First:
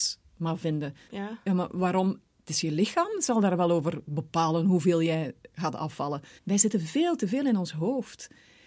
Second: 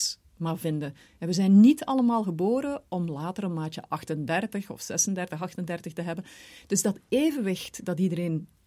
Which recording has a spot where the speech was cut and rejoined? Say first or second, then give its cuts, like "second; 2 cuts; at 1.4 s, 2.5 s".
first; 2 cuts; at 1.1 s, 6.4 s